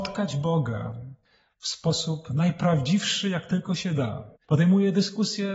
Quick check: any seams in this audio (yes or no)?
yes